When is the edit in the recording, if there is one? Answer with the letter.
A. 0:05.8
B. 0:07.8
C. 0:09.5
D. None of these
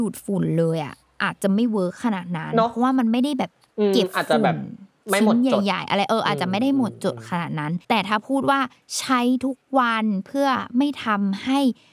B